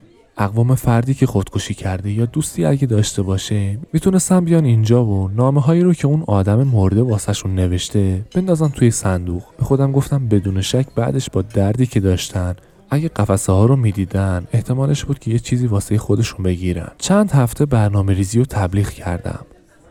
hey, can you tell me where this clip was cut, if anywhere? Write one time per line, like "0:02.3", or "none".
0:09.5
0:17.0